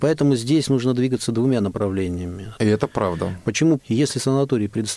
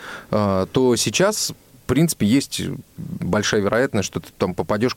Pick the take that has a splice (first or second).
first